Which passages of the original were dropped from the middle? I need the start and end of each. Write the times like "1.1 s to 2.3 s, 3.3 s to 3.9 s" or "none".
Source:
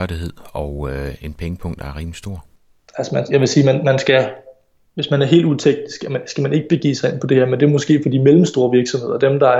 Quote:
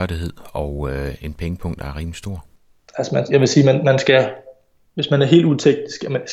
none